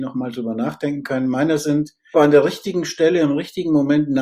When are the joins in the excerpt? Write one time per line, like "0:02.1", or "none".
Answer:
0:02.1